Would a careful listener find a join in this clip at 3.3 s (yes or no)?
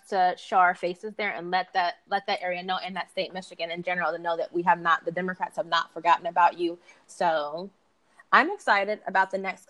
no